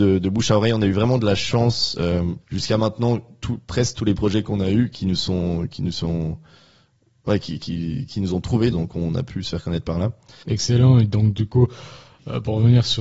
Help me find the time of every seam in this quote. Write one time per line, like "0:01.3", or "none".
0:02.4
0:08.7
0:10.4